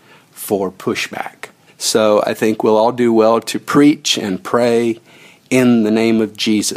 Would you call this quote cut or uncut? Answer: cut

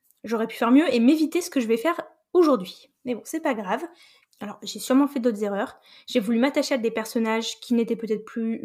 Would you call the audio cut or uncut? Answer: cut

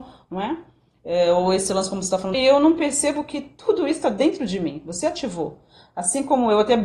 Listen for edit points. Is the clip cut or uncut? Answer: cut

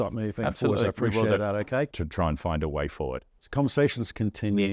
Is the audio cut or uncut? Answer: cut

